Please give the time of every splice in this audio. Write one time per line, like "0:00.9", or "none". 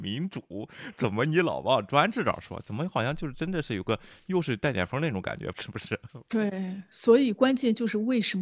0:05.5